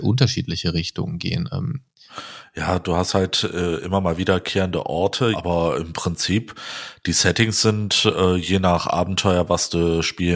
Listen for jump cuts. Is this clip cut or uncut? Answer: cut